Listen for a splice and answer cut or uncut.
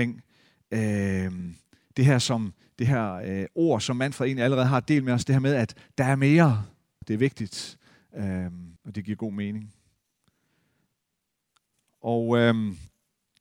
cut